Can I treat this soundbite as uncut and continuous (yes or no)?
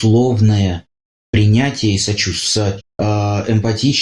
no